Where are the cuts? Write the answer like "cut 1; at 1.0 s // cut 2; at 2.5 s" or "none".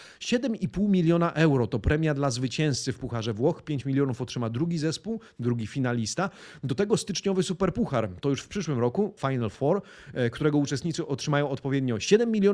cut 1; at 9.2 s